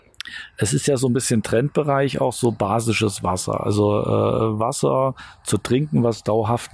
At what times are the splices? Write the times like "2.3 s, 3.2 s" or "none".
none